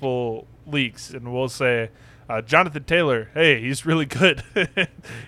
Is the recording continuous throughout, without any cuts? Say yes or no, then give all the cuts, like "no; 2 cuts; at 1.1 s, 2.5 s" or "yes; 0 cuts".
yes; 0 cuts